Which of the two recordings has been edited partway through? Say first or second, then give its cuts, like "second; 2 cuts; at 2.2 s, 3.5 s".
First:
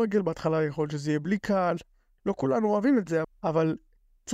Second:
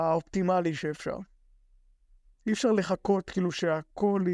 first; 1 cut; at 3.2 s